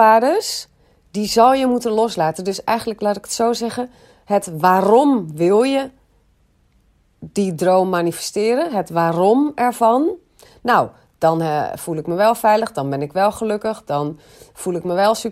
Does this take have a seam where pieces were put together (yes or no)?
no